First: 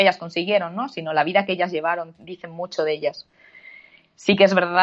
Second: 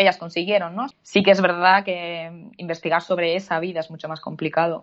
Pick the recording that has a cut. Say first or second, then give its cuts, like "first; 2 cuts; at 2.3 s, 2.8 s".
second; 1 cut; at 0.9 s